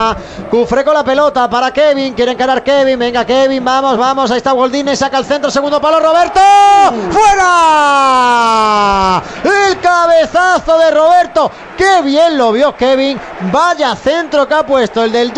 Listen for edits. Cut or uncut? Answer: cut